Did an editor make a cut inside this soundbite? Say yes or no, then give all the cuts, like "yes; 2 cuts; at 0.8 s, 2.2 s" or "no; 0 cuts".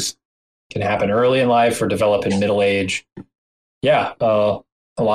no; 0 cuts